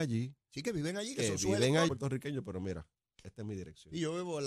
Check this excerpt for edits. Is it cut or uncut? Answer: cut